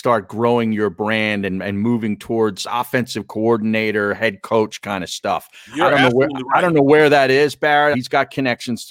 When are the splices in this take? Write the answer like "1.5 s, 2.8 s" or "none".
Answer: 7.9 s

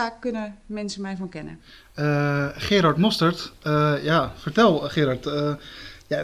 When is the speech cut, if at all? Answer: none

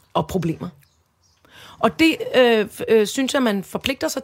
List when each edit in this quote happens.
none

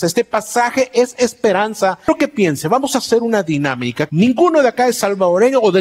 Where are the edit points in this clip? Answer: 4.1 s

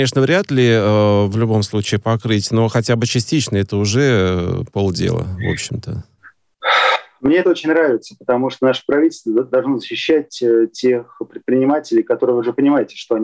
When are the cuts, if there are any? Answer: none

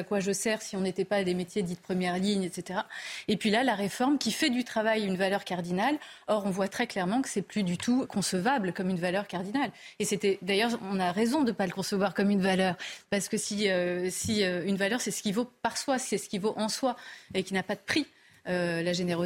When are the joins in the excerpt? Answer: 8.1 s

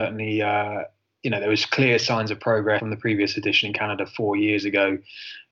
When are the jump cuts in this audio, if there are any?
2.8 s

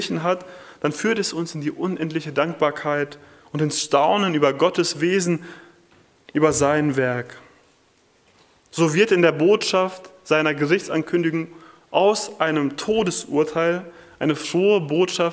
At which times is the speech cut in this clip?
none

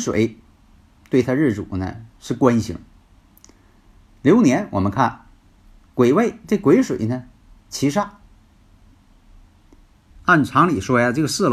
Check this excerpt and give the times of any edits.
10.1 s

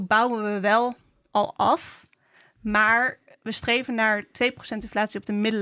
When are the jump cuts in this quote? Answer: none

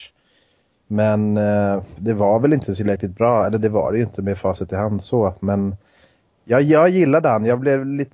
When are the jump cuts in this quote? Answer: 2.0 s

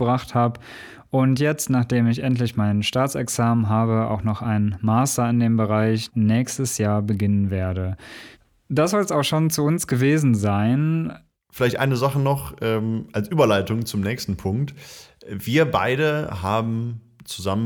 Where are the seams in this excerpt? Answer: 6.1 s

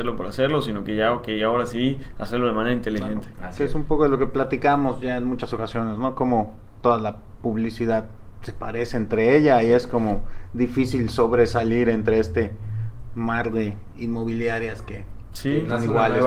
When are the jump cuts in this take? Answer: none

